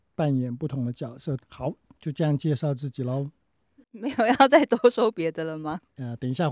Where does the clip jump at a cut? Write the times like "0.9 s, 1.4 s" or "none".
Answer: 1.4 s